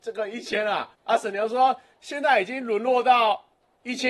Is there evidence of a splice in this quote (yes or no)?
yes